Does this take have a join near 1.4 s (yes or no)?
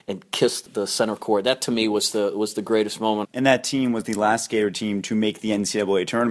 no